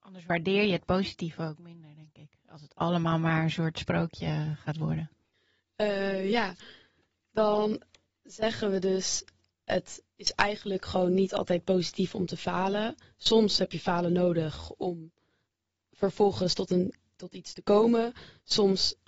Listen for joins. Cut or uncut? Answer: uncut